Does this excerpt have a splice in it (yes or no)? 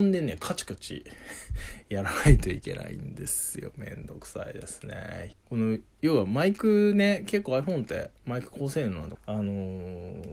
yes